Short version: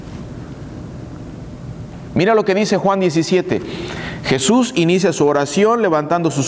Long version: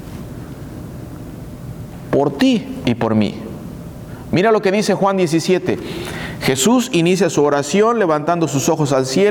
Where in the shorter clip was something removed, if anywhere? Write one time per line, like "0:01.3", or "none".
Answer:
0:02.1

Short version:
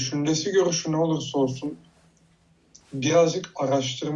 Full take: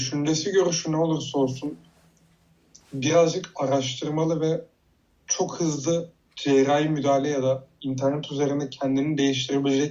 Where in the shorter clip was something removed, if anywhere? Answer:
none

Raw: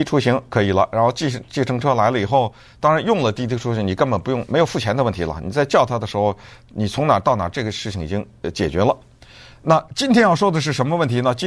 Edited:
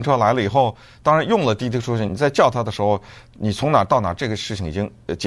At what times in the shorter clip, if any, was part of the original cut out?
0:02.1

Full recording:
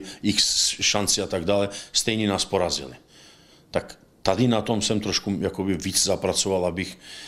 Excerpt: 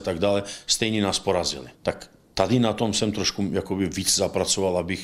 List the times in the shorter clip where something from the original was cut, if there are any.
0:01.7

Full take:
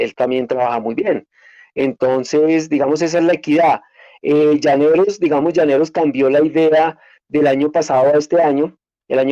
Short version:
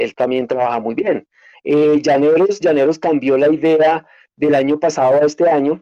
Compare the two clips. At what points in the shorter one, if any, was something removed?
0:01.5
0:02.6

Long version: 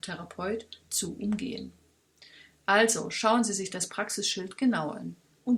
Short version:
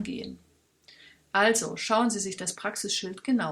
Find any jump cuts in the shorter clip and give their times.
none

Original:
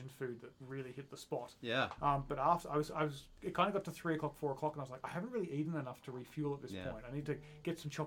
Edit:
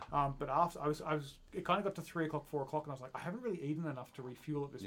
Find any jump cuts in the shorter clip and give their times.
none

